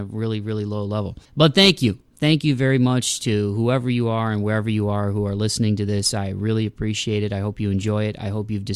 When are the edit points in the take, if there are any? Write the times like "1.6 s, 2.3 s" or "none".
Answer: 1.2 s